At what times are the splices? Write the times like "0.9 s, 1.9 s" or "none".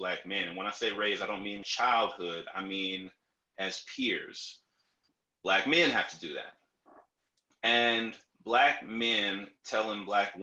1.6 s, 5.3 s